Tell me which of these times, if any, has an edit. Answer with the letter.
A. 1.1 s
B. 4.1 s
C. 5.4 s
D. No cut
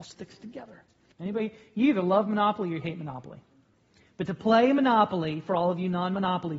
A